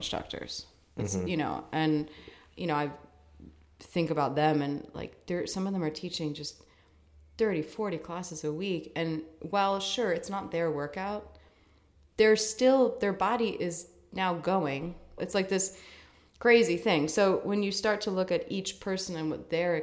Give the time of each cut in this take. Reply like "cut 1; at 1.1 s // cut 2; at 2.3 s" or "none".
cut 1; at 15.2 s